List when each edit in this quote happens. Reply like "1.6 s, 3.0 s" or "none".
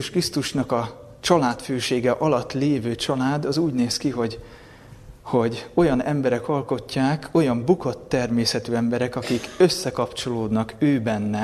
none